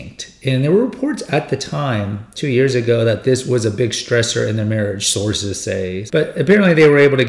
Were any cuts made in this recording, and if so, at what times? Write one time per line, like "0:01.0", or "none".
0:06.1